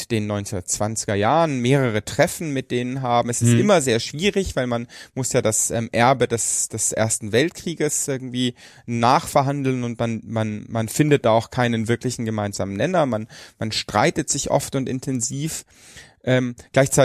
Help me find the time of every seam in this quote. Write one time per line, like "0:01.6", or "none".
none